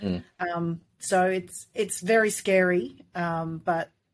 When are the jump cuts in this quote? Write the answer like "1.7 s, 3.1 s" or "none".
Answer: none